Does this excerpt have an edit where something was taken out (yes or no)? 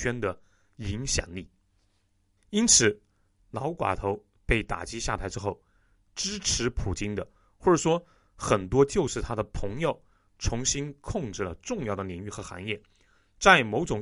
yes